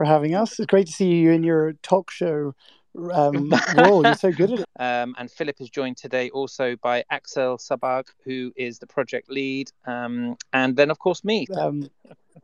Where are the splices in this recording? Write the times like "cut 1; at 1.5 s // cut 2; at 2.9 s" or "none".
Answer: cut 1; at 4.6 s // cut 2; at 11.5 s